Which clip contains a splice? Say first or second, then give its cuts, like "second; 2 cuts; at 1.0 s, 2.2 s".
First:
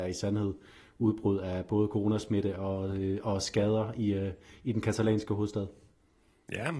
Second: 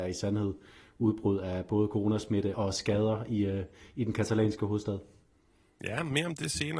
second; 1 cut; at 2.5 s